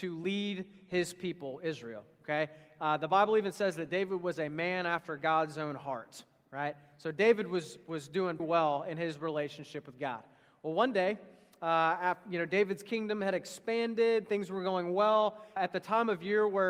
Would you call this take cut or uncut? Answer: cut